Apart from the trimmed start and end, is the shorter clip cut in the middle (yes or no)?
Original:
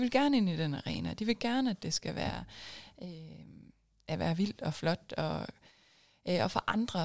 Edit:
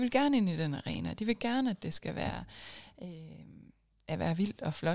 no